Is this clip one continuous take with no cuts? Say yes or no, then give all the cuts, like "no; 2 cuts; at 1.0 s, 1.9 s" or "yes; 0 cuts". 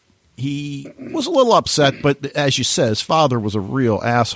yes; 0 cuts